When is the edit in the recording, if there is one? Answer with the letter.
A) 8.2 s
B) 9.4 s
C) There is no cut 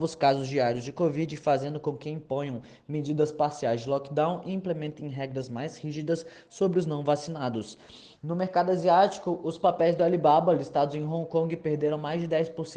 A